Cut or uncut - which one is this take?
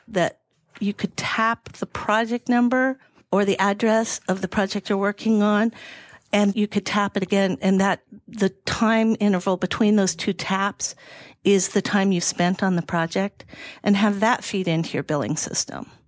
cut